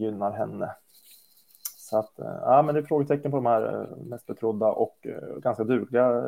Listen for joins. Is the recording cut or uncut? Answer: uncut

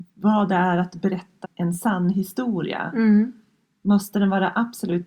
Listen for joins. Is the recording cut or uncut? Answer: cut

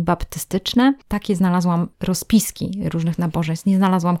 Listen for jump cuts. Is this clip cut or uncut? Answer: uncut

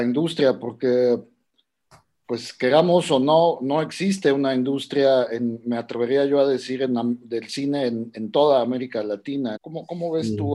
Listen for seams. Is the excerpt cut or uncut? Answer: cut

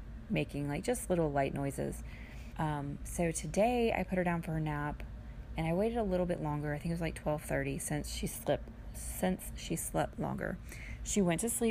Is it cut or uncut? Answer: cut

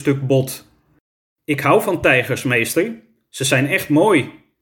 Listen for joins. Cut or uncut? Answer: uncut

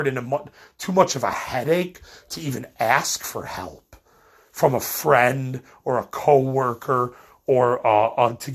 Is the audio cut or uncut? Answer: uncut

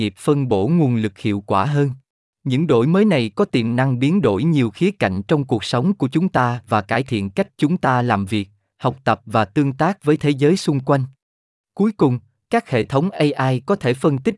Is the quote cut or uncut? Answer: cut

